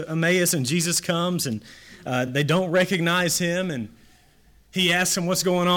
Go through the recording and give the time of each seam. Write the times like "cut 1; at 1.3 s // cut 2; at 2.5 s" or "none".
none

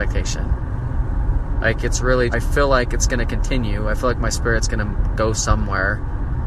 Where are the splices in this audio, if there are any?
cut 1; at 2.3 s

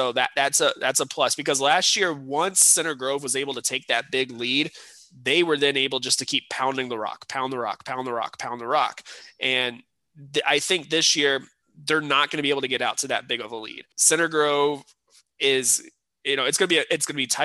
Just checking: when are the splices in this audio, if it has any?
cut 1; at 13.9 s

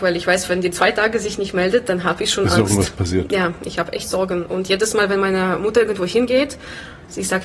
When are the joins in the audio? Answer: none

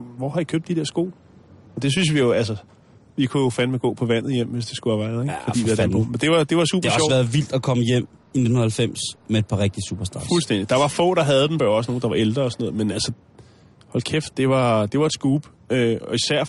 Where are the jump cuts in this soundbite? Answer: cut 1; at 11.6 s

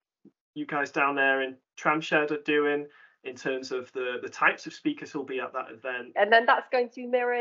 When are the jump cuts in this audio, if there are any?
cut 1; at 6.1 s

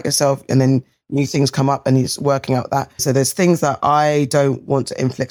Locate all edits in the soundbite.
cut 1; at 3.0 s

